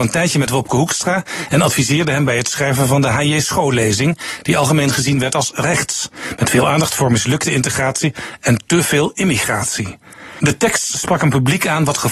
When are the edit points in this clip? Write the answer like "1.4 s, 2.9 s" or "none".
none